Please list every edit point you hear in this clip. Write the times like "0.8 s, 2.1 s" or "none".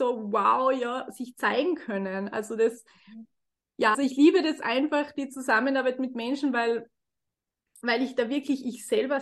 3.9 s